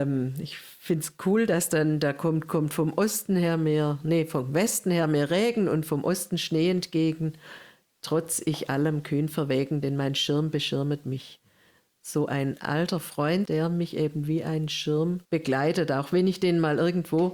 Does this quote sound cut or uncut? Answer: cut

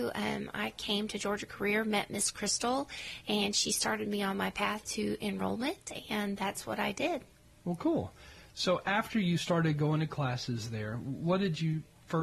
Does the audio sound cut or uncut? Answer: uncut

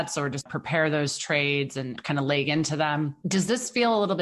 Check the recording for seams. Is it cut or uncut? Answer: cut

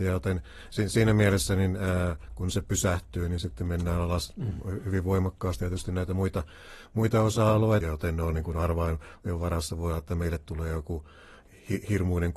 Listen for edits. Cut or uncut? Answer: cut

